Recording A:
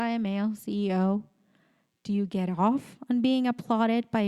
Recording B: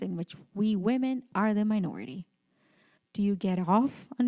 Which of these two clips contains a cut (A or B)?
B